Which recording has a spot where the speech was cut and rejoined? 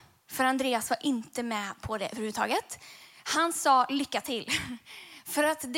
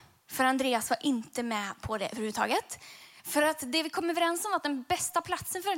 second; 1 cut; at 3.2 s

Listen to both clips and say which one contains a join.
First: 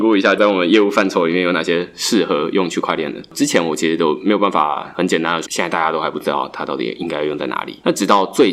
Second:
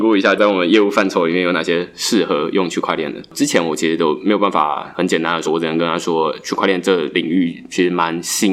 first; 1 cut; at 5.5 s

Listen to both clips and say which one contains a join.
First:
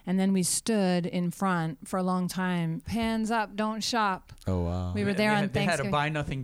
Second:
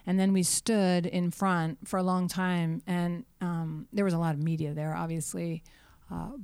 first; 1 cut; at 2.8 s

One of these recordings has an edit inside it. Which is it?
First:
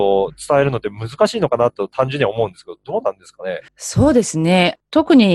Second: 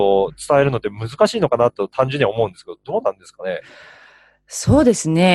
first; 1 cut; at 3.7 s

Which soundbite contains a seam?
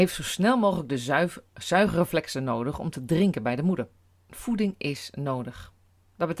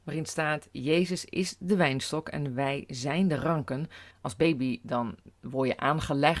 second; 1 cut; at 4.1 s

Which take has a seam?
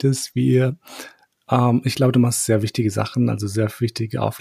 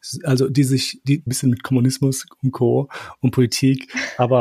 second; 1 cut; at 1.3 s

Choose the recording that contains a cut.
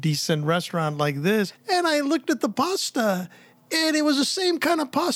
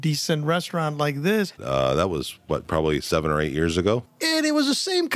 second; 2 cuts; at 1.6 s, 4.1 s

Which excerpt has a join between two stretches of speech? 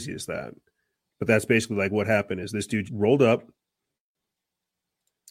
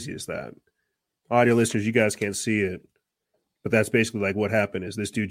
first; 2 cuts; at 1.0 s, 2.9 s

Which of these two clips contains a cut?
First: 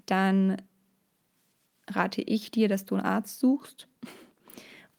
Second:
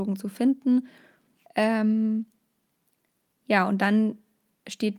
second; 1 cut; at 1.5 s

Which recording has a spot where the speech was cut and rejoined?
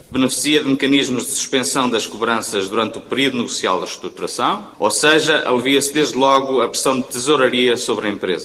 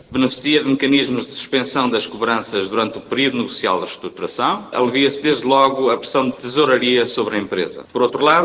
second; 1 cut; at 4.7 s

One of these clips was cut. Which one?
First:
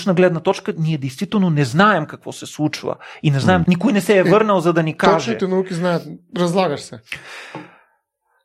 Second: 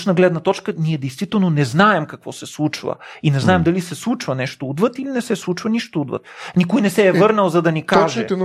first; 1 cut; at 3.6 s

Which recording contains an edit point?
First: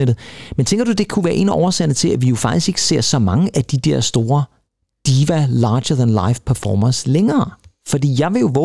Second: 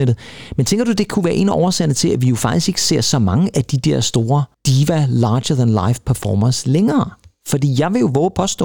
second; 1 cut; at 4.5 s

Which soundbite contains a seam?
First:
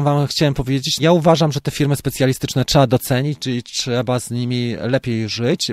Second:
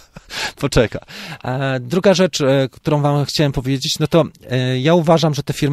first; 1 cut; at 1.0 s

